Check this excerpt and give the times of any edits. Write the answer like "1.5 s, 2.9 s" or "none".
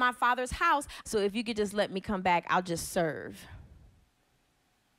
1.0 s